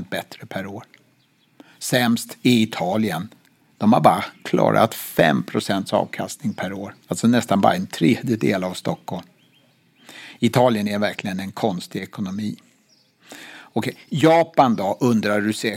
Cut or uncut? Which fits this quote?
cut